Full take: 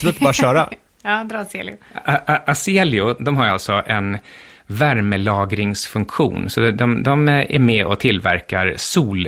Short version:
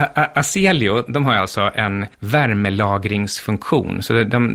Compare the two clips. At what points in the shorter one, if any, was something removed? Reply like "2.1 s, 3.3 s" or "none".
2.1 s